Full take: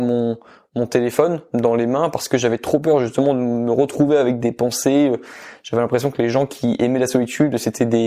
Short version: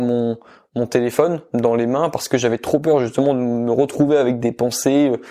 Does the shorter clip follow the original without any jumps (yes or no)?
yes